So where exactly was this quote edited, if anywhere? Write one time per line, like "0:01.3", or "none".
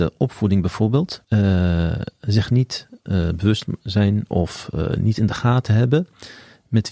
0:01.2